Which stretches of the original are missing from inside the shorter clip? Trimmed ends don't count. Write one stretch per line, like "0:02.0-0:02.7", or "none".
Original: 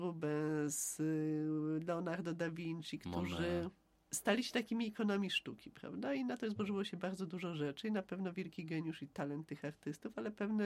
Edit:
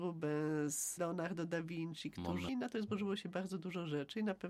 0:01.0-0:01.9
0:03.4-0:06.2